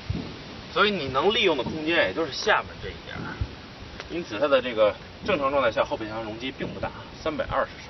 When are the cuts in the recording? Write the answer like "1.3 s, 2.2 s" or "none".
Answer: none